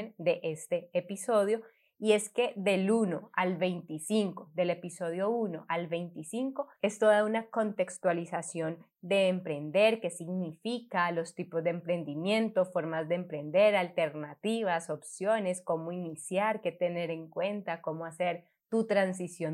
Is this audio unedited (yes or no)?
yes